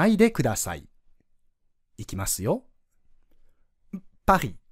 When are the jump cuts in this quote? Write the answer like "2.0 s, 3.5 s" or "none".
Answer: none

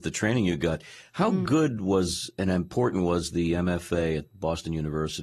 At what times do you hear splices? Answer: none

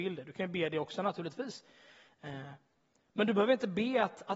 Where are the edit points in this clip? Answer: none

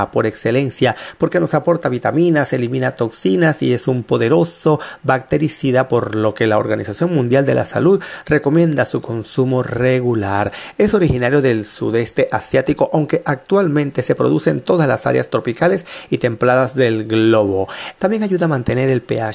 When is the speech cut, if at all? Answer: 18.0 s

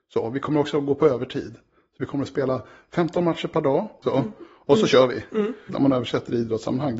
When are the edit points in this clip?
4.0 s, 5.7 s

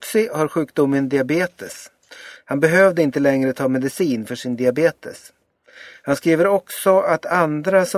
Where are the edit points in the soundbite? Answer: 2.4 s

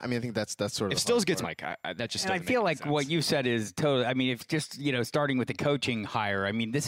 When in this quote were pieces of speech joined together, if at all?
1.4 s

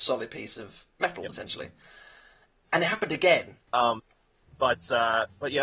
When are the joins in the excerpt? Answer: 0.9 s, 3.7 s

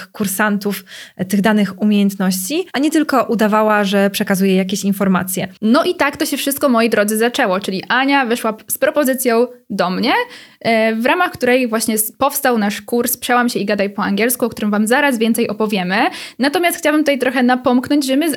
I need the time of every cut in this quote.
5.6 s

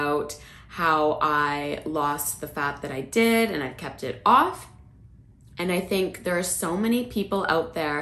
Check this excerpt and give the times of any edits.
none

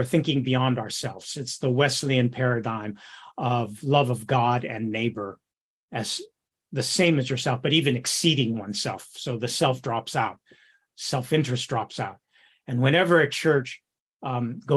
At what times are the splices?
none

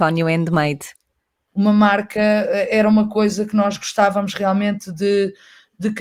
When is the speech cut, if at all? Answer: 1.5 s

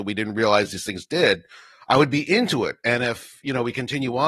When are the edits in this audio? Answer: none

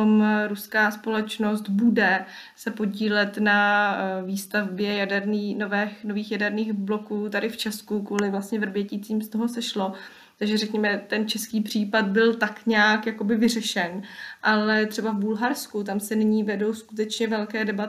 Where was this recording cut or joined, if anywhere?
none

